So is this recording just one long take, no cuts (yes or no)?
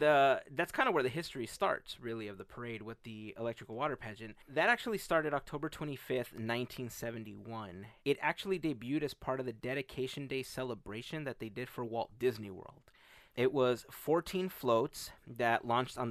no